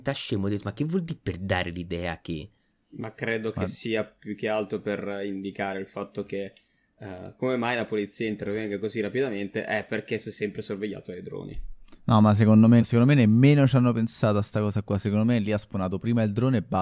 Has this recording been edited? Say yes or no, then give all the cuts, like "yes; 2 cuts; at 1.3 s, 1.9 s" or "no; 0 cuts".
yes; 1 cut; at 12.8 s